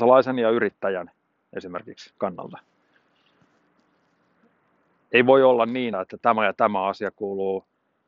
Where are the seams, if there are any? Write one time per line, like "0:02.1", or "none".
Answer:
0:05.9